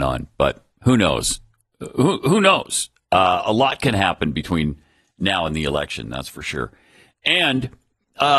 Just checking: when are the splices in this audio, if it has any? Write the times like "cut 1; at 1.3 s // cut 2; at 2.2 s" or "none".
none